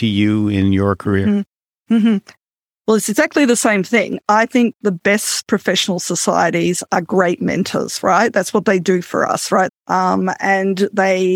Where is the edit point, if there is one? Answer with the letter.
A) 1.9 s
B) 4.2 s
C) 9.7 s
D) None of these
C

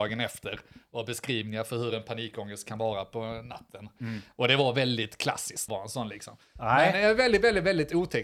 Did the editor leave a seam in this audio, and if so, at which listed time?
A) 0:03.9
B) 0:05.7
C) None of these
B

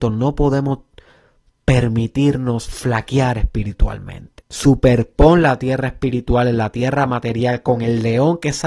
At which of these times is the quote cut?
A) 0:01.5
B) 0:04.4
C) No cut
B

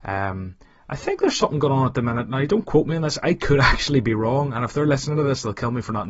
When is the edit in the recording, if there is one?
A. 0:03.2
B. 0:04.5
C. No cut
C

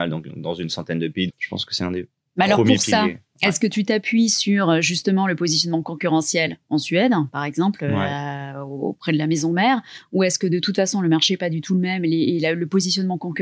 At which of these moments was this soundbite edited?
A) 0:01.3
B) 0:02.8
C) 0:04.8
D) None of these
A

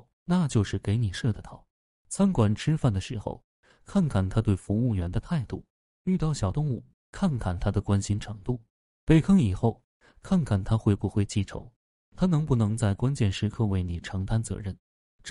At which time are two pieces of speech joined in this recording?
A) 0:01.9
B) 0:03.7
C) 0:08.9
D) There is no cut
A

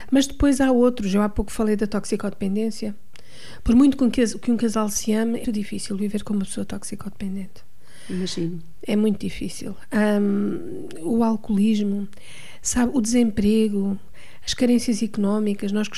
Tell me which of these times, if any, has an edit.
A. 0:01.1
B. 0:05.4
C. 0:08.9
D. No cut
B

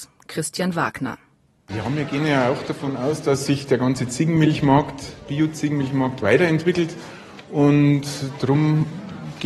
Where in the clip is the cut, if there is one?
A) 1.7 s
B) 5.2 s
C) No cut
A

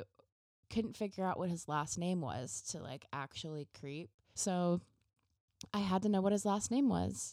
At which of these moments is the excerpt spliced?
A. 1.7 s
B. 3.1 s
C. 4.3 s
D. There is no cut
C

